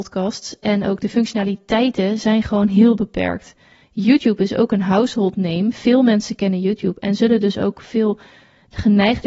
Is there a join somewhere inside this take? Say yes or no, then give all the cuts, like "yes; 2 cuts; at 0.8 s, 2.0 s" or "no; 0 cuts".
no; 0 cuts